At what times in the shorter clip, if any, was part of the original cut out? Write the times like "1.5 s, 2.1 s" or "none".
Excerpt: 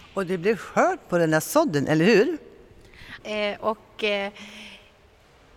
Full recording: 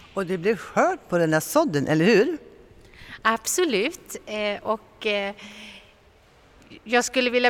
3.2 s

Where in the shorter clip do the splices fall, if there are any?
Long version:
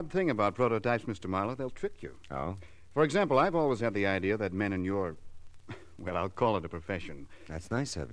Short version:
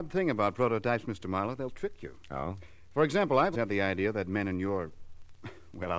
3.5 s

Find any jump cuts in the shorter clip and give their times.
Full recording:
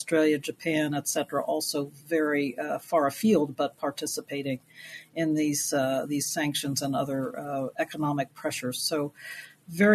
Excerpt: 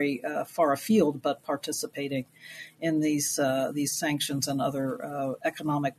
none

